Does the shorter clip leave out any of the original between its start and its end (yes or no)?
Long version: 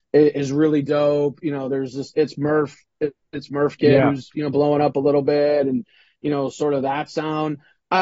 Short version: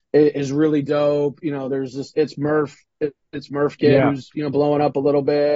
no